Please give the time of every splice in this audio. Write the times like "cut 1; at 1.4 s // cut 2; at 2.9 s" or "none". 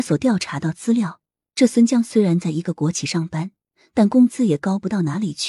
none

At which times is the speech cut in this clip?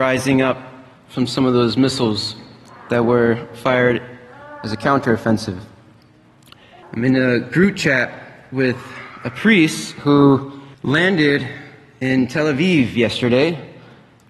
cut 1; at 6.8 s // cut 2; at 10.7 s

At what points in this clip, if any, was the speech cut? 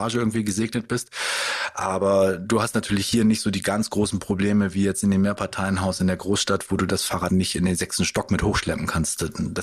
cut 1; at 7.3 s

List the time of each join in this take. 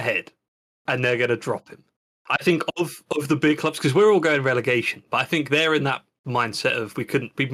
none

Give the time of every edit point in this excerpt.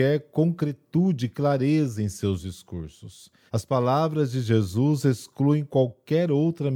cut 1; at 3.5 s

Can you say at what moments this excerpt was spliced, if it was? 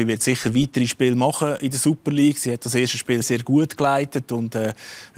cut 1; at 3.2 s

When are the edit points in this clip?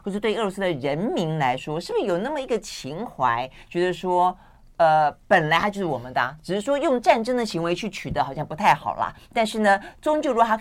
none

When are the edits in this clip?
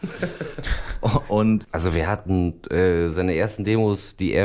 cut 1; at 1.6 s

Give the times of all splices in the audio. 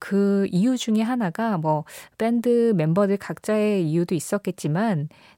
none

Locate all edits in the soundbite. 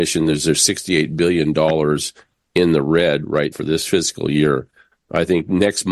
cut 1; at 3.5 s // cut 2; at 4.9 s

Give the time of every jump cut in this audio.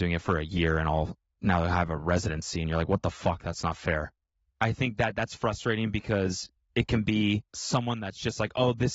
none

